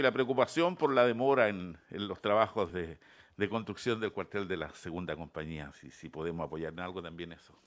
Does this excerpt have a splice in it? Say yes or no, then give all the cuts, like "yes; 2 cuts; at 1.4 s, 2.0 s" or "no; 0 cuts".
no; 0 cuts